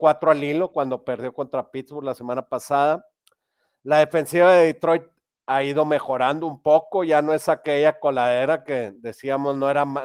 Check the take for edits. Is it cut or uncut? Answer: uncut